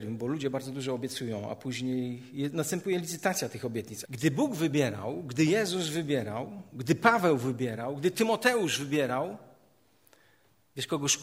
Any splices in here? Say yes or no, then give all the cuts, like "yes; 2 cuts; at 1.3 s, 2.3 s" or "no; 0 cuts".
yes; 1 cut; at 4.0 s